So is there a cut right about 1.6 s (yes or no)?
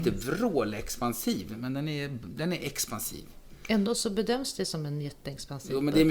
no